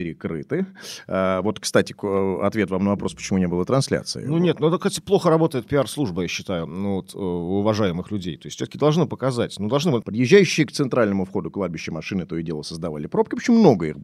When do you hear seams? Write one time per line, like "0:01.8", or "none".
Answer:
0:10.0